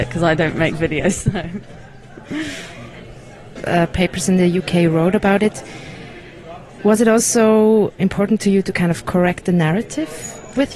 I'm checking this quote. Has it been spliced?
yes; 2 cuts; at 3.6 s, 8.0 s

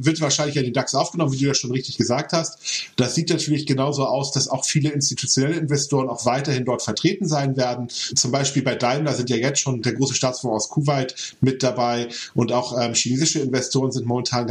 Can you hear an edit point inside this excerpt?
no; 0 cuts

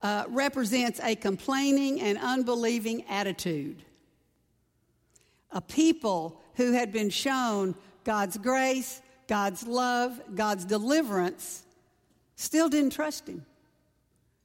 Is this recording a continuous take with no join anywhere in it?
yes; 0 cuts

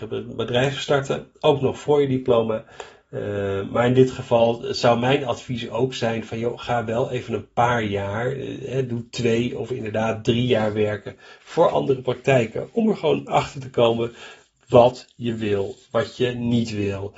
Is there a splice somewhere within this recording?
no; 0 cuts

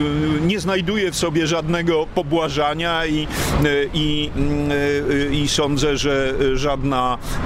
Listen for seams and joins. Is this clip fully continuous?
yes; 0 cuts

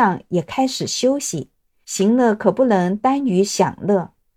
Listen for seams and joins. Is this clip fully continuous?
no; 1 cut; at 1.8 s

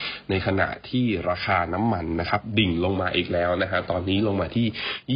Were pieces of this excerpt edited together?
no; 0 cuts

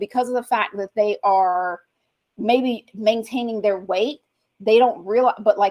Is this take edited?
no; 0 cuts

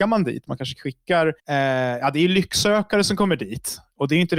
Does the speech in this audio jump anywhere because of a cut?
yes; 1 cut; at 1.4 s

